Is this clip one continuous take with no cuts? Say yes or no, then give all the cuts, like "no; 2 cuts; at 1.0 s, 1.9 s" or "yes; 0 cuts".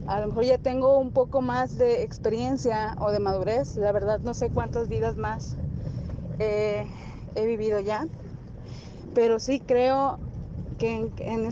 yes; 0 cuts